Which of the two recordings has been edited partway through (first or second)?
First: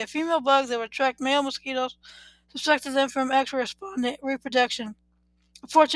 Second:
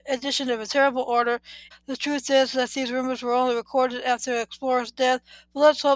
second